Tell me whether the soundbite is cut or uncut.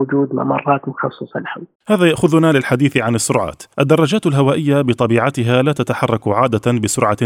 cut